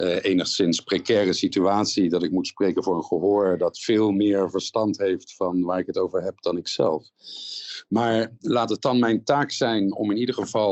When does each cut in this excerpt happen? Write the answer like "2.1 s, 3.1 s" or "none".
none